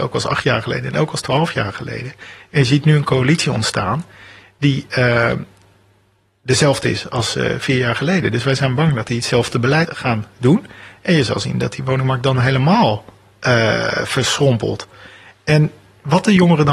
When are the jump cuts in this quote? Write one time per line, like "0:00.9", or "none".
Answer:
0:09.9

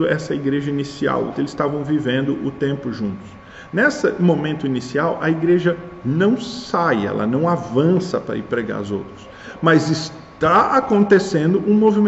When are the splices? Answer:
none

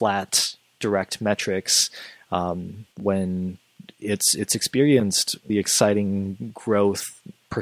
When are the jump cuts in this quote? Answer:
0:02.9
0:05.5

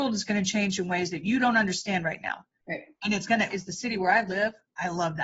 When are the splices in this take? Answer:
0:03.5

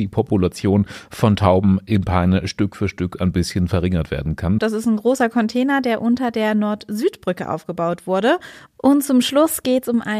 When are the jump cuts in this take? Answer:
0:04.6
0:08.7

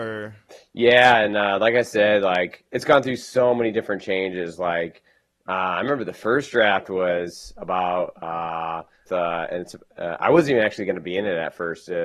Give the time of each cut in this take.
0:09.1

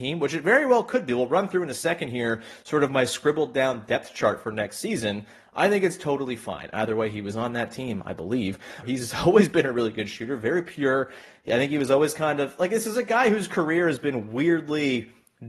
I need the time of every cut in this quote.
0:06.7
0:08.8

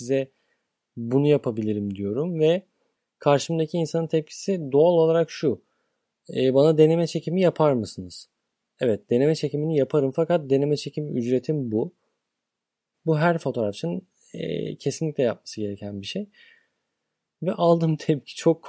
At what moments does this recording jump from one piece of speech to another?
0:12.9

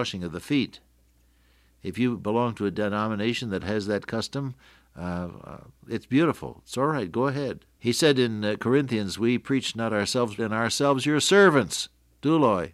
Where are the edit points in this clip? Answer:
0:07.8
0:10.4

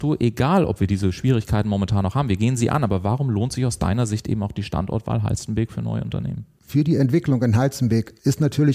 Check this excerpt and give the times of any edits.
none

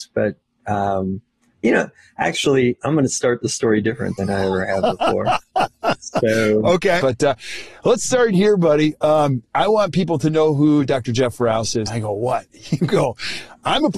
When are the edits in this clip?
0:07.0
0:11.9

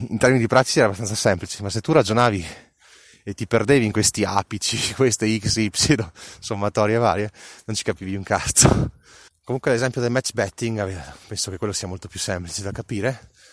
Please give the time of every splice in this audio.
0:09.3

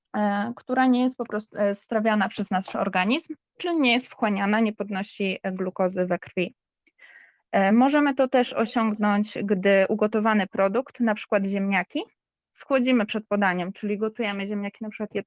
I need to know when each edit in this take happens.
none

